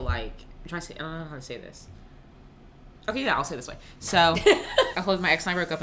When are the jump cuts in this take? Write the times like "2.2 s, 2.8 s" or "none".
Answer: 4.9 s